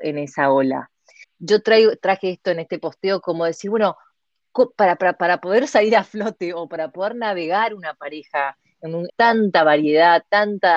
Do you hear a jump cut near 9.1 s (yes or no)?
yes